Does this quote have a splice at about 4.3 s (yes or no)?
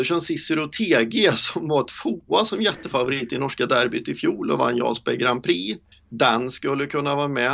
no